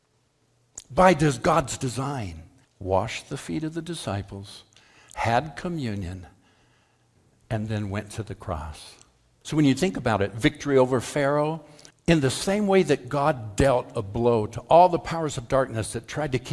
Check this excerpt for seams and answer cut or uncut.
cut